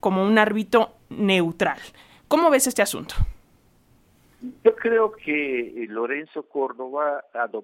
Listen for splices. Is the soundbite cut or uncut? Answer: uncut